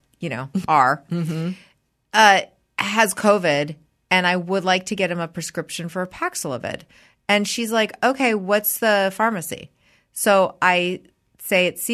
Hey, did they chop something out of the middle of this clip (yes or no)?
no